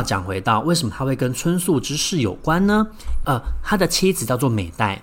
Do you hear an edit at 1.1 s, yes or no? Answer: no